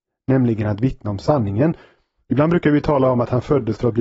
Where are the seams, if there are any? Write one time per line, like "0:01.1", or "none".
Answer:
none